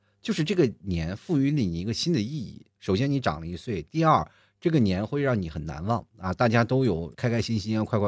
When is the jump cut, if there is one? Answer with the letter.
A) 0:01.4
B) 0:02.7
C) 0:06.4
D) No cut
D